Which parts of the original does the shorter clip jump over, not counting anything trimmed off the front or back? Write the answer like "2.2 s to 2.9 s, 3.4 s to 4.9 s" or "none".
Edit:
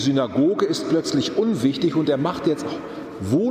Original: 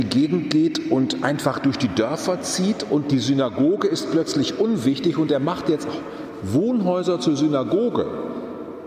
none